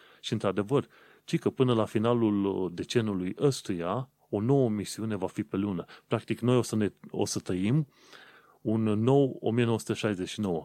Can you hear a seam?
no; 0 cuts

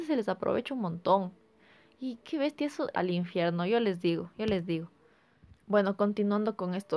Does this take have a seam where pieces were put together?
yes; 1 cut; at 2.9 s

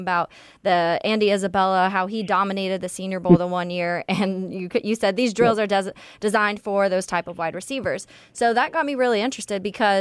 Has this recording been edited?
no; 0 cuts

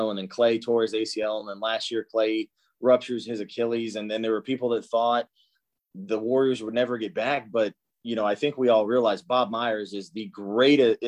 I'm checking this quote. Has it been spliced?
no; 0 cuts

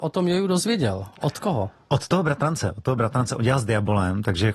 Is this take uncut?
yes; 0 cuts

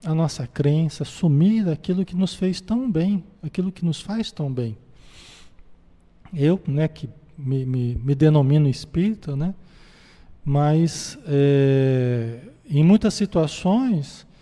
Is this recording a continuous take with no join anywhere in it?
yes; 0 cuts

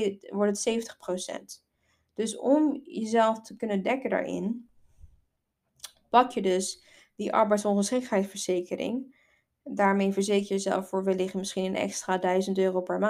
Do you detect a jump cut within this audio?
no; 0 cuts

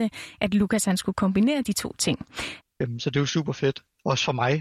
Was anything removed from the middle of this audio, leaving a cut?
yes; 1 cut; at 2.6 s

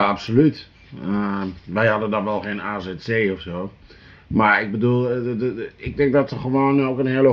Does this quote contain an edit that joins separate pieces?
no; 0 cuts

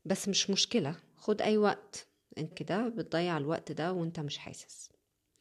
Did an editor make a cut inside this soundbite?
yes; 1 cut; at 2.5 s

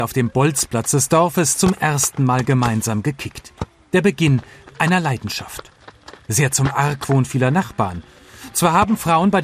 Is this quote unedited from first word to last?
yes; 0 cuts

